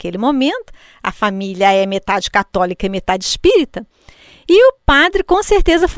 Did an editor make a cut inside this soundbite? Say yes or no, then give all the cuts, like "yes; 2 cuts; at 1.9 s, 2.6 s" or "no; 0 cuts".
no; 0 cuts